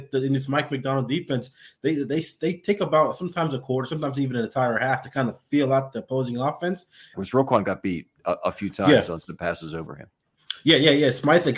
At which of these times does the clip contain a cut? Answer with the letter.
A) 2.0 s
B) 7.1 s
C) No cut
B